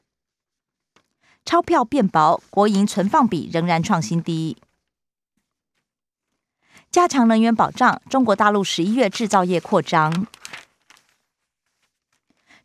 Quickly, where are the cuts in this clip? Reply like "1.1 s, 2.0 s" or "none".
none